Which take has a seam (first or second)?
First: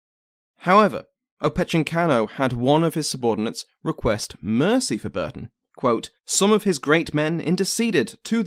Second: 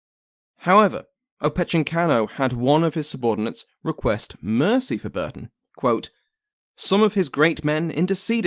first